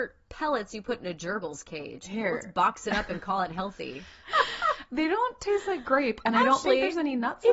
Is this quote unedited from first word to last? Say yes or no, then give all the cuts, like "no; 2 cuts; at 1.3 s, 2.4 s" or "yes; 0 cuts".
no; 1 cut; at 4.2 s